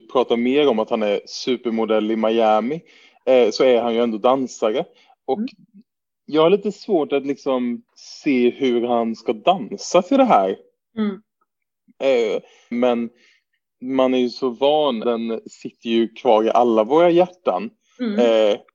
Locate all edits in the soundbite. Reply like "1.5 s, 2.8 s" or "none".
7.9 s, 12.7 s, 15.0 s